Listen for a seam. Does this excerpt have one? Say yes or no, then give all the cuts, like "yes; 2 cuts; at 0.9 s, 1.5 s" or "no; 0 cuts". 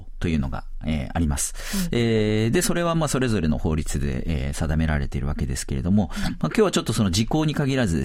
no; 0 cuts